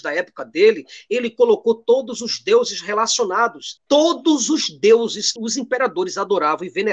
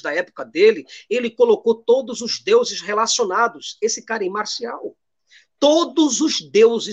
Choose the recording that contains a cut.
first; 2 cuts; at 3.8 s, 5.4 s

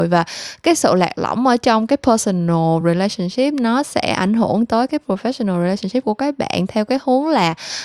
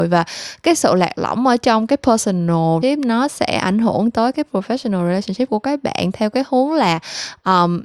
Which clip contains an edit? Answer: second; 1 cut; at 2.8 s

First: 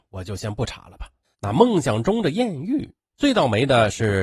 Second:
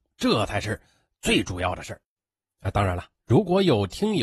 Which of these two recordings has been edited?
first; 2 cuts; at 1.3 s, 3.0 s

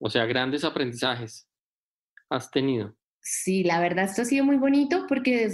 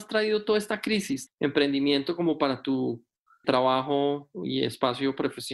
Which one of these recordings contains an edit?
second; 2 cuts; at 1.3 s, 3.4 s

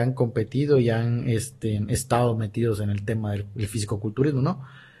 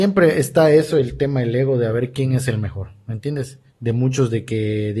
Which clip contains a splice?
second; 1 cut; at 3.7 s

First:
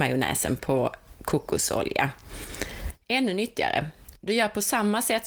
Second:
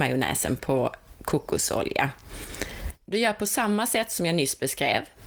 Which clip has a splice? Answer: second; 1 cut; at 3.0 s

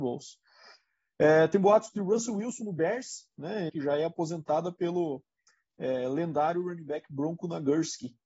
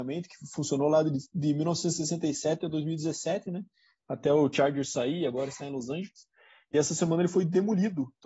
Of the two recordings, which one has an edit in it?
first; 1 cut; at 3.7 s

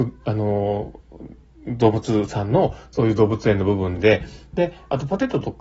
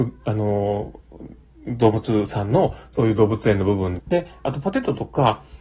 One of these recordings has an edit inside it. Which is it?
second; 1 cut; at 4.0 s

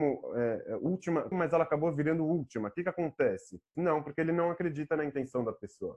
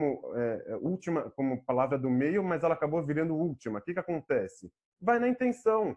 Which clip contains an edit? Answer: first; 2 cuts; at 1.3 s, 3.7 s

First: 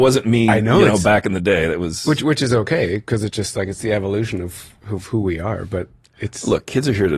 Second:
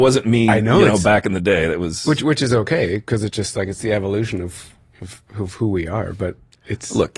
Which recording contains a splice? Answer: first; 1 cut; at 4.8 s

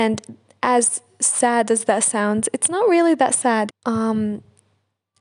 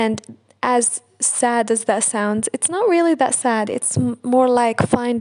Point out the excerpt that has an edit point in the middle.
first; 1 cut; at 3.7 s

